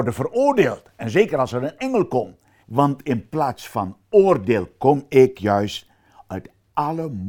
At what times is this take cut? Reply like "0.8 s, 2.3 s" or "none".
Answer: 2.6 s